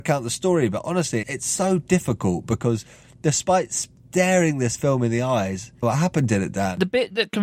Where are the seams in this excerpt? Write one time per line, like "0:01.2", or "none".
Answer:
0:01.2
0:05.8